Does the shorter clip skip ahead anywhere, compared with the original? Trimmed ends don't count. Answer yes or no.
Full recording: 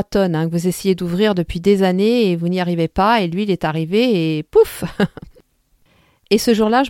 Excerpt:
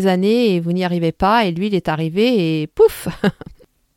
no